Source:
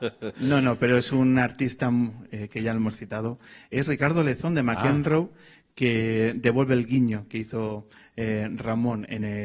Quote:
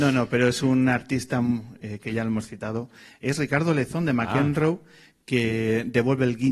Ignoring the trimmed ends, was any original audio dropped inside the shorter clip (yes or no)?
no